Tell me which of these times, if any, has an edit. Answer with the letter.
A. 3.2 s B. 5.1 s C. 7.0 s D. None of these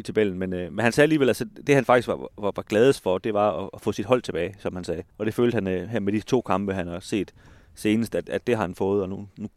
B